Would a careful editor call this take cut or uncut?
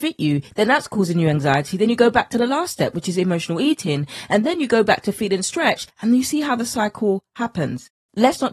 uncut